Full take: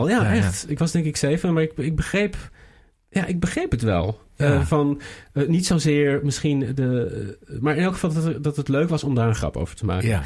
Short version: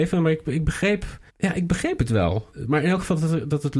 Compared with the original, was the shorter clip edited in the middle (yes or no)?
yes